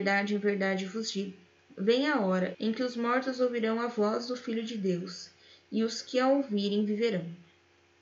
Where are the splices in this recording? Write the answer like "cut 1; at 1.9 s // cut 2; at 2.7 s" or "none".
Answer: cut 1; at 2.5 s